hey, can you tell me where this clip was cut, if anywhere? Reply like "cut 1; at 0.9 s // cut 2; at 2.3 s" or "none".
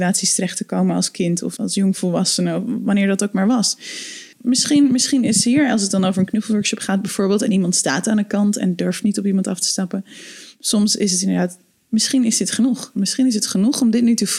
cut 1; at 1.6 s // cut 2; at 4.3 s // cut 3; at 12.9 s